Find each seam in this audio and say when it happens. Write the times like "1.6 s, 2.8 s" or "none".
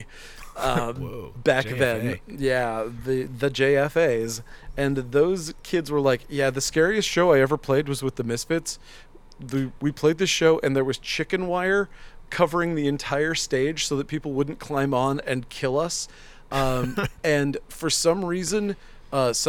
none